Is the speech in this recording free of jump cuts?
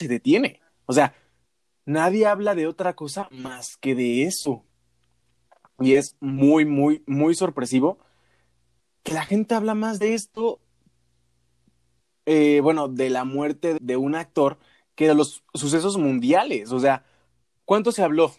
no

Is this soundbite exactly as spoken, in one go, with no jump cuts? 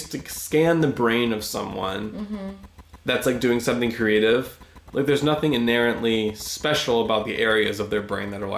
yes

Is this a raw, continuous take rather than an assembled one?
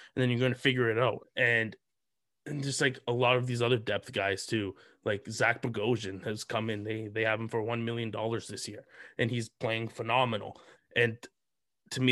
no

